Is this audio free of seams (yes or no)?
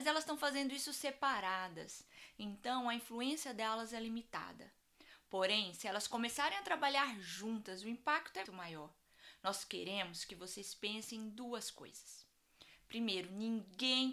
no